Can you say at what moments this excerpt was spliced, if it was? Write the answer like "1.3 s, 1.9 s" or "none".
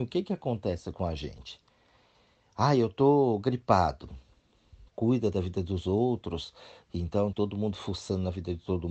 4.9 s, 7.3 s